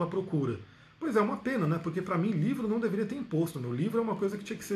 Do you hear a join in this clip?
no; 0 cuts

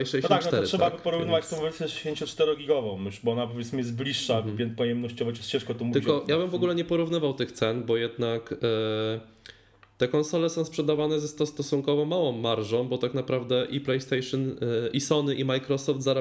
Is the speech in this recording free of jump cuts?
yes; 0 cuts

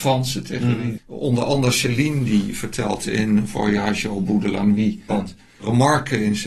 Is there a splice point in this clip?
yes; 2 cuts; at 1.0 s, 5.1 s

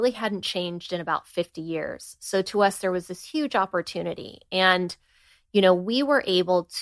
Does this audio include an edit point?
no; 0 cuts

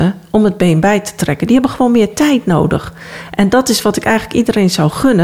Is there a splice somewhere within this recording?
no; 0 cuts

